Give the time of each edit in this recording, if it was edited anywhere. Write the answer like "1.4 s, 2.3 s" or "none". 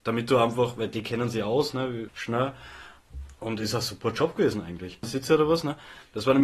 2.1 s, 5.0 s